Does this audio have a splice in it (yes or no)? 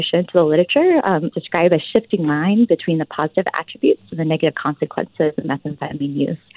yes